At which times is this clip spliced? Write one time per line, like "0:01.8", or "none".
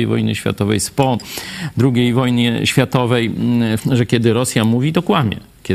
0:03.8